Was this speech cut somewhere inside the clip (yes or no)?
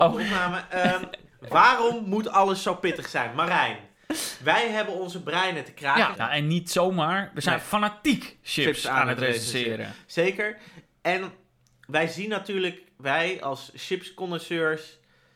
yes